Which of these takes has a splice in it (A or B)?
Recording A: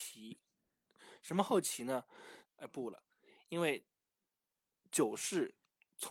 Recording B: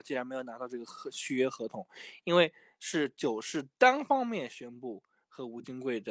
A